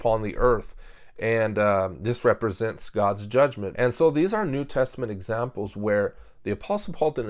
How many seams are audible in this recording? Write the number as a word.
one